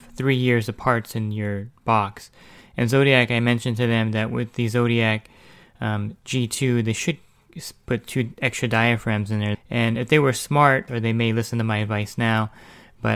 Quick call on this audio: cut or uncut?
cut